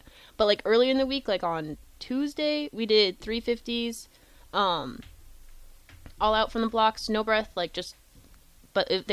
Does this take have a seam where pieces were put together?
no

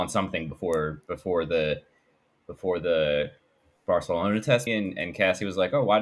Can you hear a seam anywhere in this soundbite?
yes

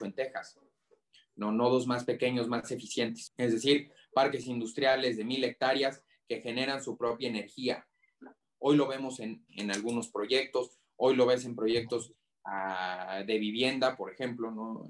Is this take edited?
yes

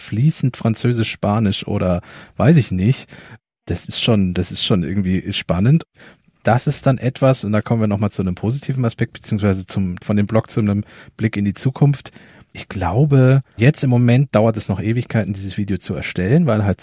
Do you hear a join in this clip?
yes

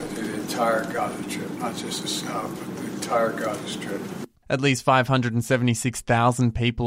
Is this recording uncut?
yes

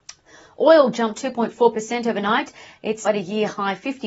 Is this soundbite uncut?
no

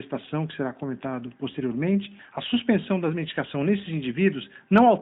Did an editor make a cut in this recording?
yes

